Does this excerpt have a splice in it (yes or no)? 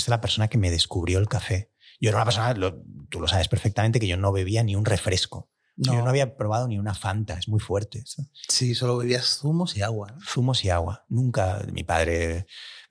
no